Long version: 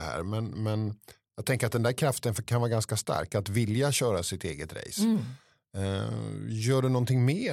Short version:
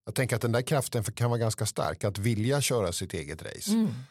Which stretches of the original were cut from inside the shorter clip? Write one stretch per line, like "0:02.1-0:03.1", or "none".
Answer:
none